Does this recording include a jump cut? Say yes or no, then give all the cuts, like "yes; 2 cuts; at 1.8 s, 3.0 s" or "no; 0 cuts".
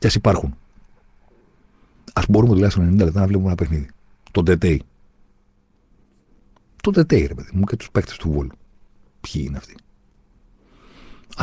no; 0 cuts